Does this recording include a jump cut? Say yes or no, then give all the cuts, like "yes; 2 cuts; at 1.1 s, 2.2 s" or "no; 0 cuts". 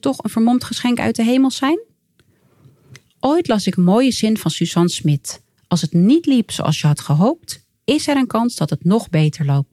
no; 0 cuts